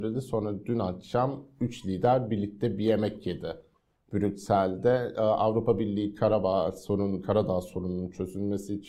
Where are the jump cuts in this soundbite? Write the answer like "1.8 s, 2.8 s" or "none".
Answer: none